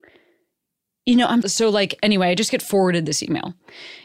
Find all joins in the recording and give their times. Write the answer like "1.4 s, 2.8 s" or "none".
1.4 s